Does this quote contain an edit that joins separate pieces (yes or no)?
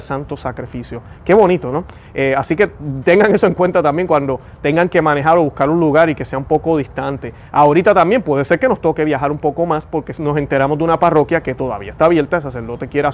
no